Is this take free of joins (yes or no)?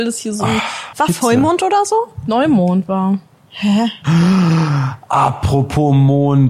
no